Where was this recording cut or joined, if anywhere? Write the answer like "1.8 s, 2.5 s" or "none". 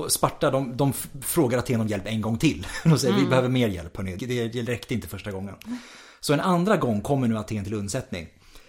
4.2 s